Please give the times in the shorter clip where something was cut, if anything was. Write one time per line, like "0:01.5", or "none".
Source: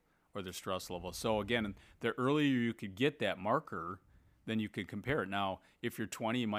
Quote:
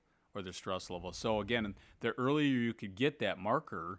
none

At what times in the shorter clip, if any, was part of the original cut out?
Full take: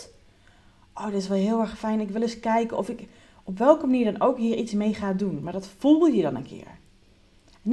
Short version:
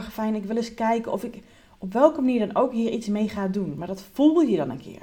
none

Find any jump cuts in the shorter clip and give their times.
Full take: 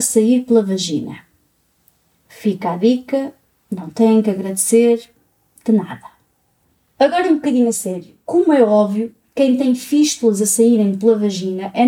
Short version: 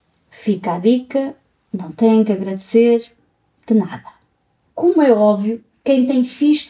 0:04.7

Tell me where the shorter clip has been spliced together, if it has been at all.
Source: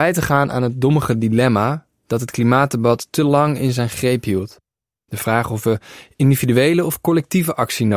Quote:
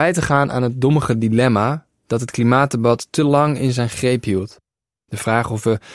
none

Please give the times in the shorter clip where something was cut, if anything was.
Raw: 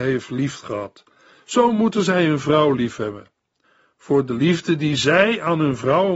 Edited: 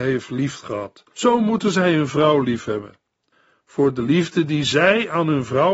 0:01.1

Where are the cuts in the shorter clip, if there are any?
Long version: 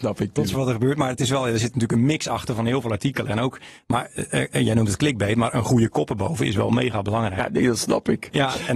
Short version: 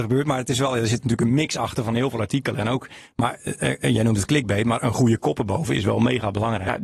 none

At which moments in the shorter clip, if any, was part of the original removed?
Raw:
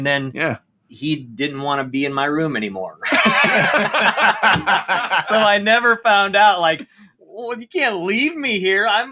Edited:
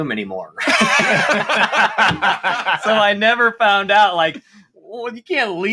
none

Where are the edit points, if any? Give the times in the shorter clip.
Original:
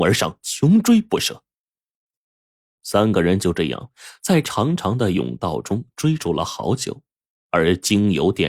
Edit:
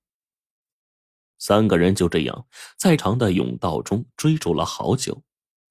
0:03.0

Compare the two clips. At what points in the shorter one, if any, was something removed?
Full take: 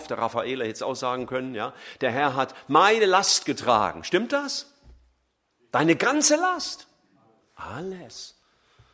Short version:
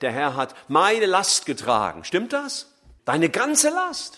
0:03.0

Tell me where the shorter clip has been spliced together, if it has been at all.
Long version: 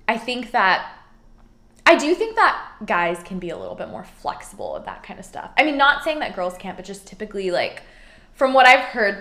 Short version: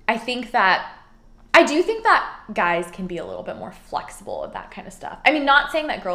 0:01.5

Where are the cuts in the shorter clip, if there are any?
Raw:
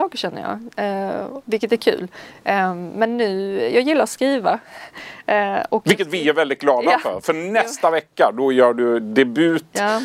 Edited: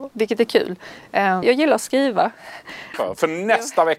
0:01.4
0:02.9

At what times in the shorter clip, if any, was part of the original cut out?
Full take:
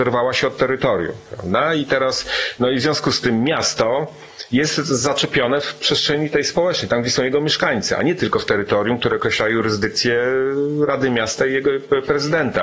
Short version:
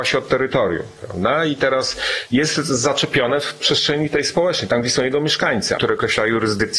0:02.3
0:05.8

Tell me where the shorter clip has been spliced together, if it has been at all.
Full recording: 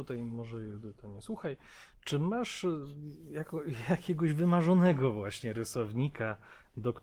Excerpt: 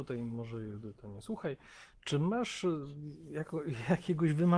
none

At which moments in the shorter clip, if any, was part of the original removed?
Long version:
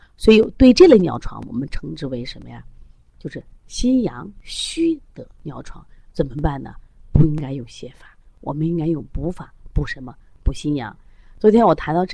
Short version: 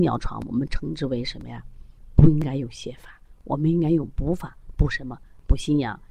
0:02.0

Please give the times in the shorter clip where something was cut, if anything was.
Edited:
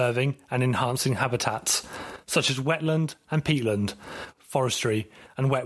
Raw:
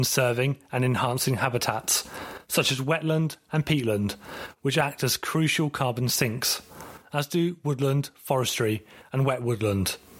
0:04.4

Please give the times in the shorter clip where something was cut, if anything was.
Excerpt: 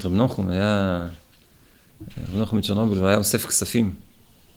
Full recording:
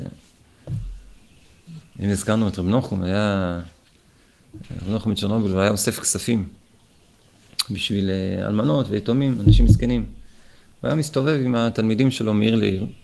none

